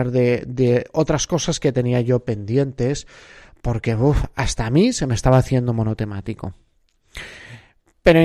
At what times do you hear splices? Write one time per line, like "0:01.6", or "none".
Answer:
none